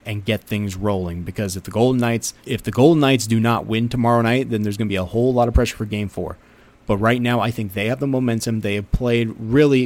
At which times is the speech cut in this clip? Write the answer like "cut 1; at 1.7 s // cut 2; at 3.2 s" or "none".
cut 1; at 2.4 s